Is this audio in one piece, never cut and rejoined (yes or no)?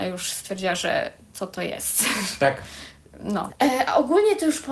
no